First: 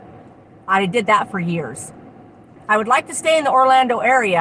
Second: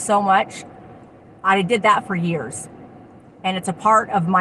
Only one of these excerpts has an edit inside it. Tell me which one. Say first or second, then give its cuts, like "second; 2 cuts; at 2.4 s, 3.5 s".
first; 1 cut; at 2.6 s